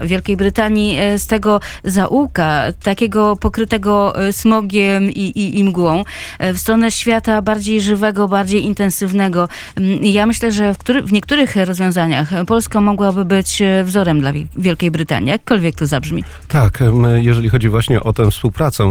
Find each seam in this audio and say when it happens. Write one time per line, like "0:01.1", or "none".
none